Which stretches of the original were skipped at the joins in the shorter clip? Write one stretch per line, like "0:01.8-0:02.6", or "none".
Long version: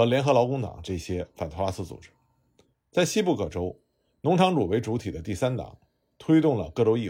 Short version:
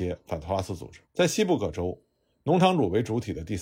0:02.1-0:02.8